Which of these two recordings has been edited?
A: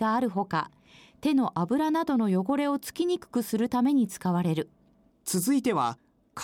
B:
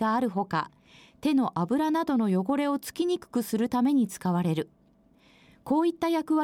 A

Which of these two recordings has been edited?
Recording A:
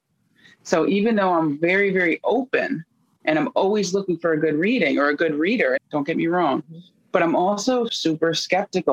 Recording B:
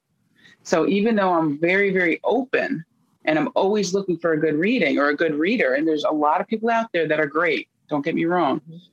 A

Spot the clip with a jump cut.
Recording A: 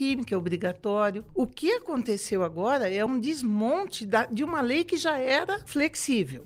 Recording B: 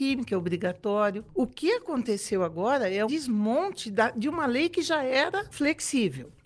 B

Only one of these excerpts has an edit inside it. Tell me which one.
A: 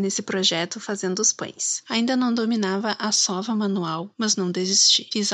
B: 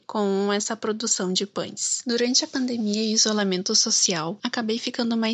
A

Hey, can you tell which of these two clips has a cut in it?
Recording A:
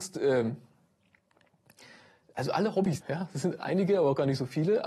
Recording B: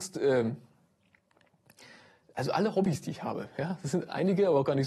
A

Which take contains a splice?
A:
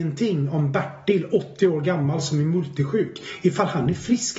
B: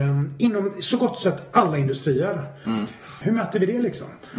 B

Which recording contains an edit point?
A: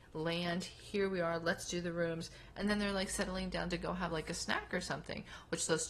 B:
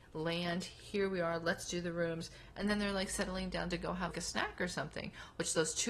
B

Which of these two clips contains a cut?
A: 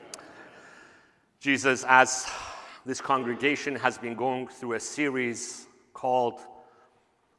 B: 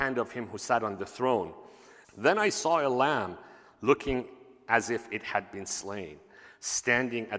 B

